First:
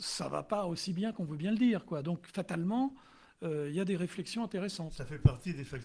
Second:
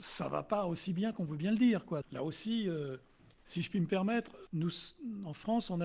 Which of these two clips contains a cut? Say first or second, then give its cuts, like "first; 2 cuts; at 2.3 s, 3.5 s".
second; 2 cuts; at 2.0 s, 4.5 s